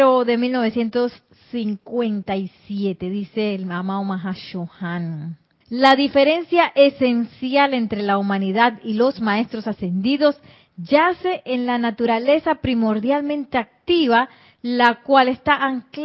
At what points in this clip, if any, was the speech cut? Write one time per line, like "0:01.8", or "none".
0:05.6

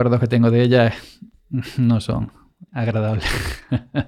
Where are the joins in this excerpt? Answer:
0:02.7

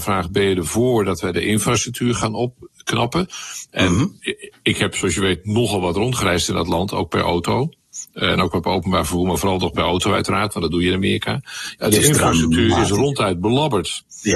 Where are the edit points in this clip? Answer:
none

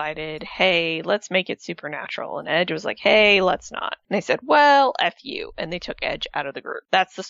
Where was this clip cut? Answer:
none

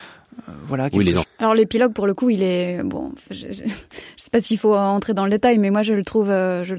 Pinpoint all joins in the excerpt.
0:01.2

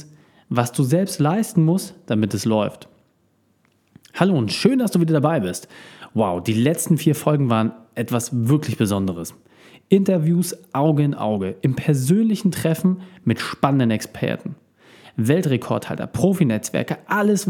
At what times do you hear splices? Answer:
none

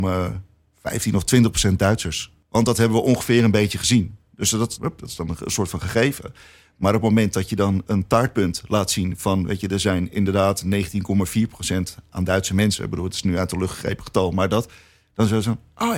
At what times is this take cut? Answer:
0:04.8

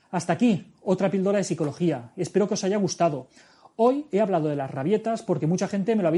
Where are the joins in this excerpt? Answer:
none

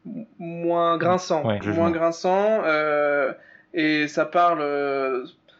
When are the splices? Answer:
0:01.6

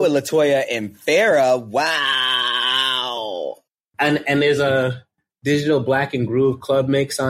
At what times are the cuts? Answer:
none

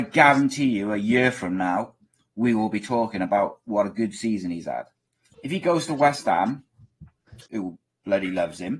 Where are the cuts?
0:05.3
0:07.5

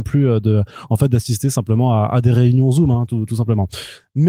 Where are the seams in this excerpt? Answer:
none

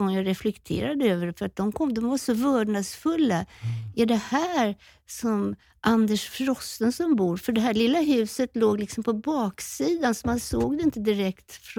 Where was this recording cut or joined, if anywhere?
none

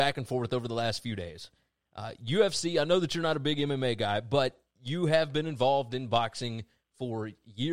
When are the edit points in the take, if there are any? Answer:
none

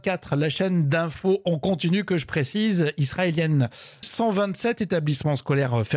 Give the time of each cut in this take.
0:04.0

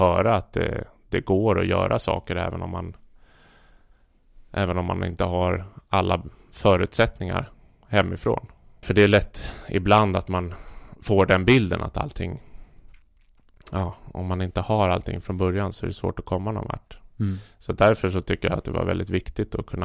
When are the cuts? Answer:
0:08.8

